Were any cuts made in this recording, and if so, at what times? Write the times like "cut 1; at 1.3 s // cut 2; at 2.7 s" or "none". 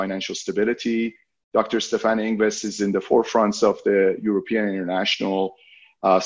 none